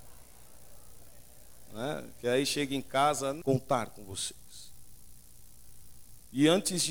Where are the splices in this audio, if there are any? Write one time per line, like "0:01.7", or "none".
0:03.4